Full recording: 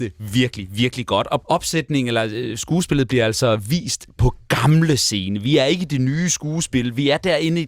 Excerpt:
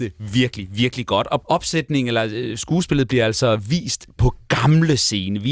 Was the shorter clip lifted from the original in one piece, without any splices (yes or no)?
yes